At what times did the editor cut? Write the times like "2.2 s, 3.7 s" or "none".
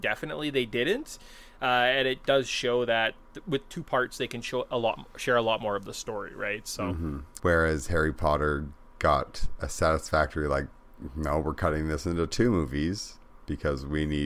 7.4 s